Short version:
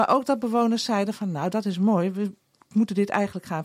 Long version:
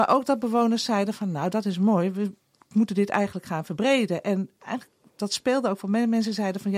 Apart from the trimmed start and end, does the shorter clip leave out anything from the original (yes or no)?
no